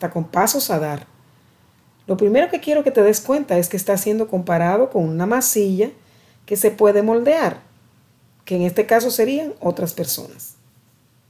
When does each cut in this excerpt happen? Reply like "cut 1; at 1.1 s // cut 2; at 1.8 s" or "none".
cut 1; at 8.4 s